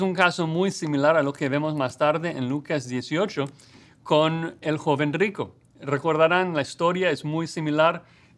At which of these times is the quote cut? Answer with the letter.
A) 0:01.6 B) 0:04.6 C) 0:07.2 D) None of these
B